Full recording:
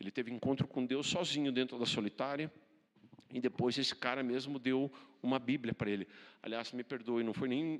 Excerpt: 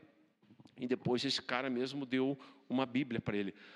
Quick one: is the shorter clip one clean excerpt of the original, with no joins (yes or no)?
yes